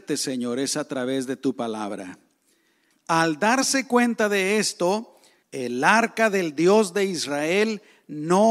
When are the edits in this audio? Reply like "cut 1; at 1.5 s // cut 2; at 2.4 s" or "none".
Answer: cut 1; at 2.9 s // cut 2; at 5.4 s